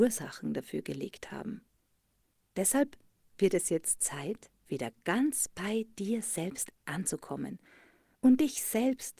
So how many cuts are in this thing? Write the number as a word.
one